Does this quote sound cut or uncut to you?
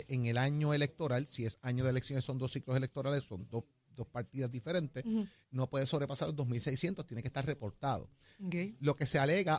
uncut